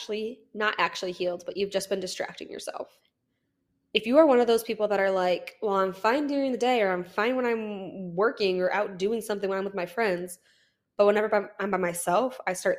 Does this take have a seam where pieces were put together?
no; 0 cuts

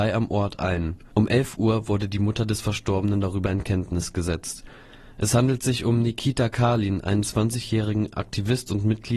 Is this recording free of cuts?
yes; 0 cuts

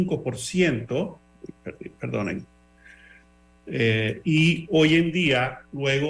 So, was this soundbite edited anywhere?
no; 0 cuts

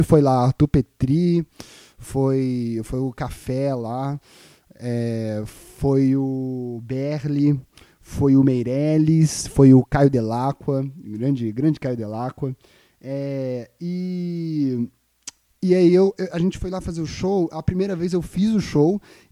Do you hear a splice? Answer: no; 0 cuts

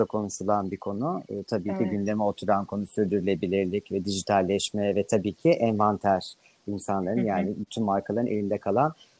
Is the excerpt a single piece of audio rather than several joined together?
yes; 0 cuts

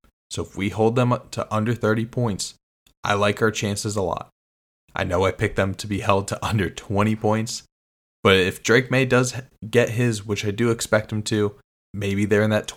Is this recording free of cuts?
no; 1 cut; at 11.8 s

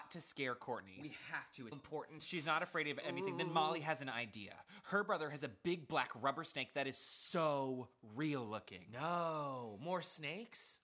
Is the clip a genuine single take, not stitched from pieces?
no; 1 cut; at 1.7 s

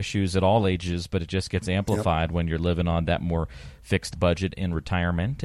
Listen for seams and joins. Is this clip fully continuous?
yes; 0 cuts

